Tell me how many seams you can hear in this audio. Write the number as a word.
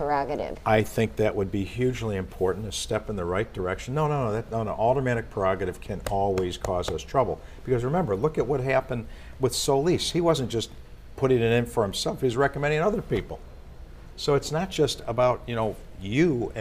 zero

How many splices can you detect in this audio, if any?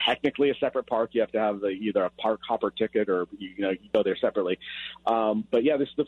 zero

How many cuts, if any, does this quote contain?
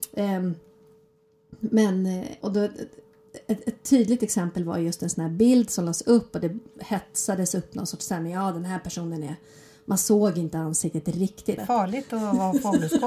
two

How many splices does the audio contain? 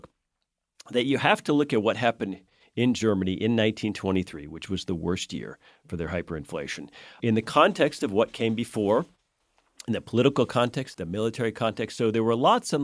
two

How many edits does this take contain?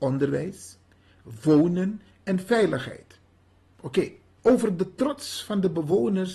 one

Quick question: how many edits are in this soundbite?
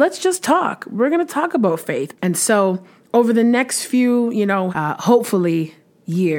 two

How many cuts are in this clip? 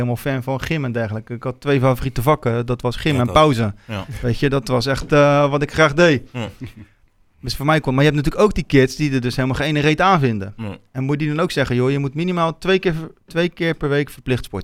zero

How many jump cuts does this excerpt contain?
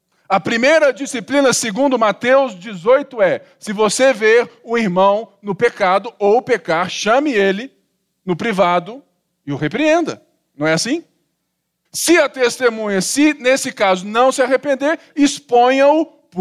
one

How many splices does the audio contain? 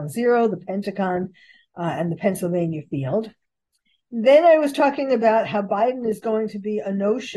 one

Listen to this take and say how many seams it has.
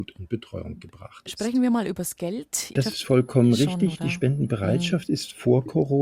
one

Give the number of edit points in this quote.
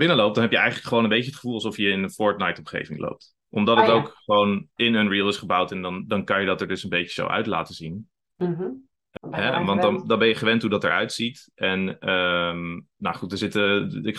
one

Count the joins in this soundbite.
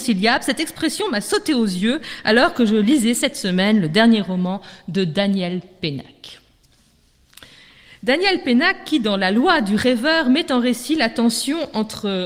zero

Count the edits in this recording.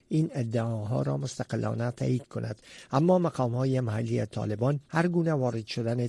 zero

